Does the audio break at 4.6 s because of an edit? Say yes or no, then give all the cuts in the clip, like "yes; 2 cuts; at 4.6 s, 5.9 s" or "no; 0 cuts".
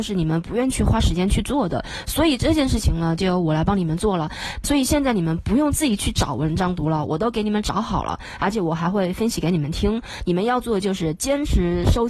yes; 1 cut; at 4.6 s